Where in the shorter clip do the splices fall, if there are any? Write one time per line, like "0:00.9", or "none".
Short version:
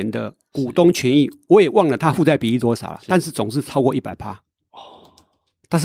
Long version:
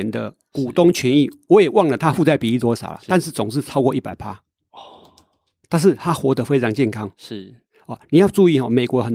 none